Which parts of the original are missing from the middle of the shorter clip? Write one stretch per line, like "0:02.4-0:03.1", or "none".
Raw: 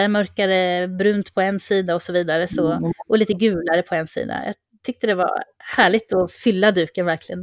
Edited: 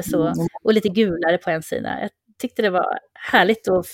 none